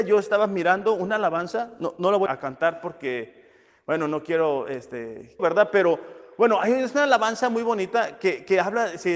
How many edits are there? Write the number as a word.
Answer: two